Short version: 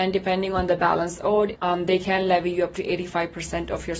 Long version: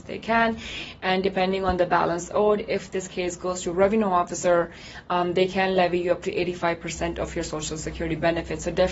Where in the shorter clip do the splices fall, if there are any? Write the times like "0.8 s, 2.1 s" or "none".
1.6 s

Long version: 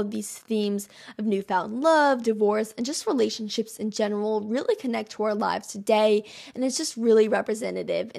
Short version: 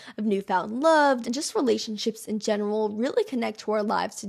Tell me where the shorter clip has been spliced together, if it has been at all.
1.2 s

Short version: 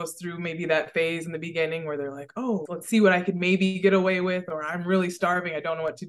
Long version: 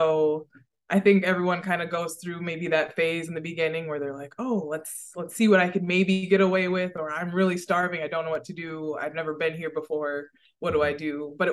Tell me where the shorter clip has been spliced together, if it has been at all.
2.7 s

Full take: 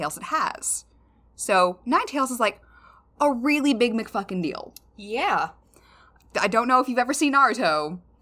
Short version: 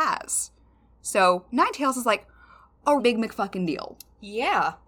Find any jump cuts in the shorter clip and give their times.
3.0 s

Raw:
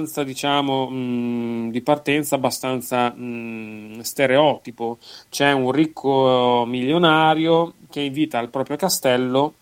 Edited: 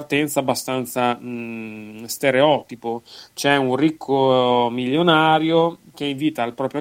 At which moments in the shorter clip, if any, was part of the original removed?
none

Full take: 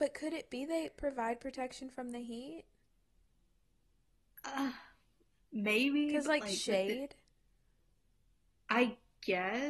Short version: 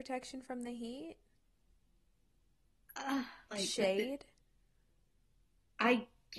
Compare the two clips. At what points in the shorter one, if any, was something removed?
3.5 s

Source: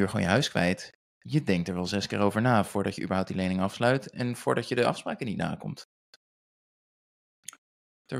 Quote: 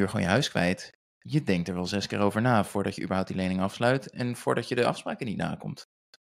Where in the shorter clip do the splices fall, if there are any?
none

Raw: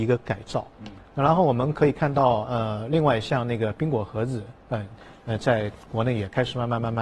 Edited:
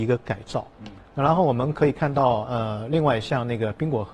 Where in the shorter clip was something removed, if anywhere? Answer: none

